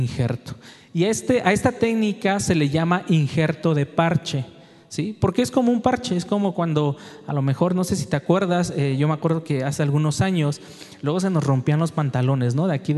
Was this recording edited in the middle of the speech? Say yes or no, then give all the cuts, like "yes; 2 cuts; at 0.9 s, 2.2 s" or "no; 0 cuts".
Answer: no; 0 cuts